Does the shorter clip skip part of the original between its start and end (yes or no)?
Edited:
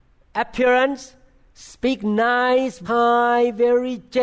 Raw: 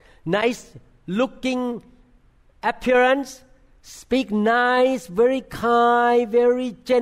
yes